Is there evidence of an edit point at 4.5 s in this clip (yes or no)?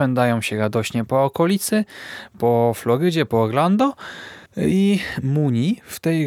yes